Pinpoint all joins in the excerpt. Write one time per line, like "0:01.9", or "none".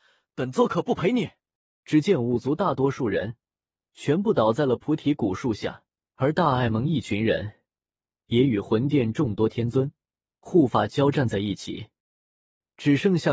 0:01.8
0:06.0